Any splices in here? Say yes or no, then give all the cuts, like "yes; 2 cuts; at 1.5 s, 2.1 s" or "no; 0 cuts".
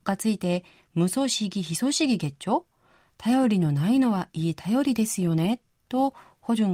no; 0 cuts